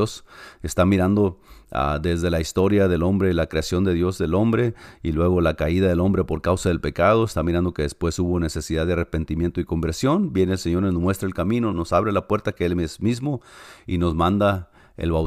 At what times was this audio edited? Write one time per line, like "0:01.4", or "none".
0:11.7